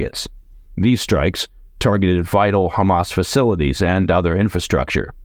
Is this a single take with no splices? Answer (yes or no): no